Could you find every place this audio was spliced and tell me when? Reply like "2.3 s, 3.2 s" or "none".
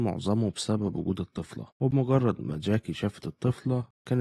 1.7 s